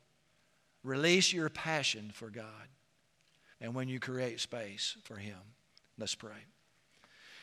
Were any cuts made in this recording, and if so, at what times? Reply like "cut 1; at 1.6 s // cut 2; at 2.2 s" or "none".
cut 1; at 3.5 s